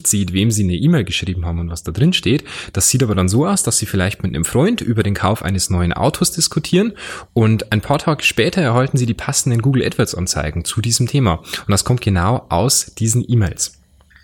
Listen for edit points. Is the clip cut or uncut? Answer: uncut